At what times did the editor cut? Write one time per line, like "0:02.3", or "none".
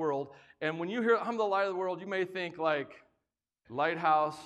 none